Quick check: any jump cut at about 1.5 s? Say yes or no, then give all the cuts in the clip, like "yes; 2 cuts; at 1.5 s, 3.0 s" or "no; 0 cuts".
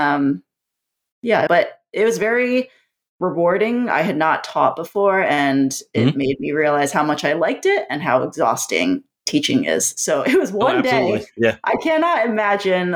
yes; 1 cut; at 1.5 s